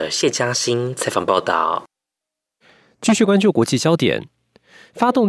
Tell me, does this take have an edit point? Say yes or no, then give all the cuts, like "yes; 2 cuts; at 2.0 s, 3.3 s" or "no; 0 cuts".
no; 0 cuts